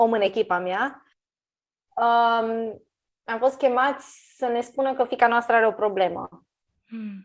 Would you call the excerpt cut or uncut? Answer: uncut